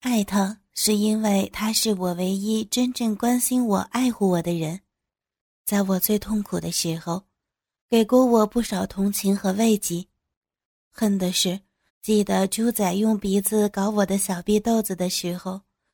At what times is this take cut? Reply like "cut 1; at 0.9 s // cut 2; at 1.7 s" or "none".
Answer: cut 1; at 11.9 s